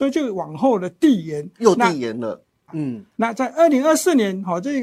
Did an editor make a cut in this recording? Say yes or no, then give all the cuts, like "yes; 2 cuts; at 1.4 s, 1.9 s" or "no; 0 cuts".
yes; 1 cut; at 2.7 s